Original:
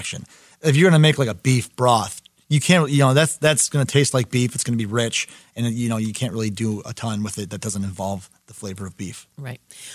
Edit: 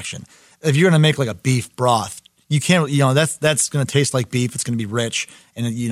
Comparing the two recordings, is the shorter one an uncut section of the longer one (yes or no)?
yes